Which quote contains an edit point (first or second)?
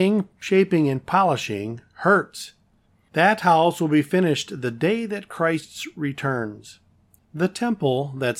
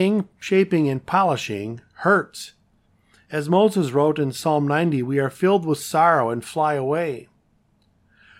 first